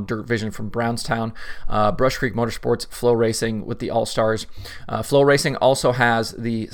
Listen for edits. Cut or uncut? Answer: uncut